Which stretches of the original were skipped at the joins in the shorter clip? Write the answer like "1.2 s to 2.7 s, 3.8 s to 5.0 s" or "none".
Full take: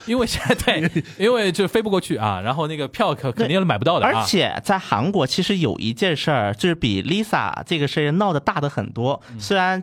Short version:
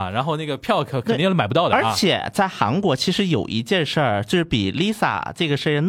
none

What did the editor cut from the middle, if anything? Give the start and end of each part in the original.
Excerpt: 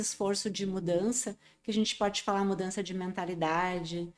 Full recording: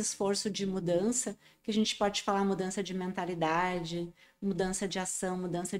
none

